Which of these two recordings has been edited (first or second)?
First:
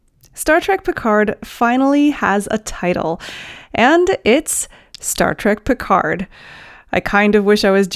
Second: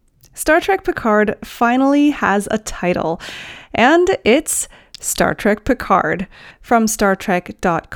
second